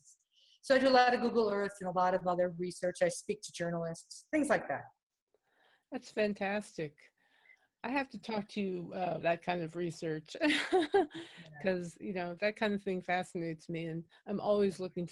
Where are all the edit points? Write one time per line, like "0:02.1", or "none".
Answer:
0:09.2

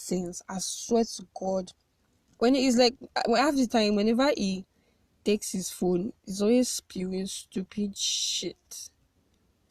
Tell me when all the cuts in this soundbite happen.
none

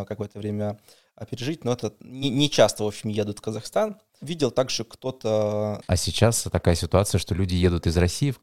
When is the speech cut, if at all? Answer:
0:05.8

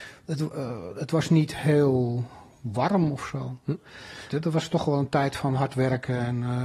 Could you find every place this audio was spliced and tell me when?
0:04.3

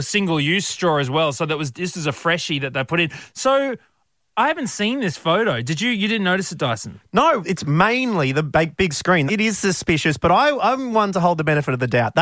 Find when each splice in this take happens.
0:07.4
0:09.3

